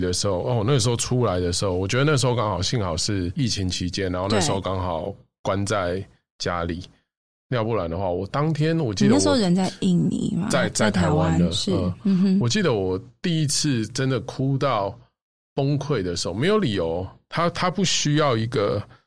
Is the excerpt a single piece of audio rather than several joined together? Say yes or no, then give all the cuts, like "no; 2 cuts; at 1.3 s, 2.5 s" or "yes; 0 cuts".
yes; 0 cuts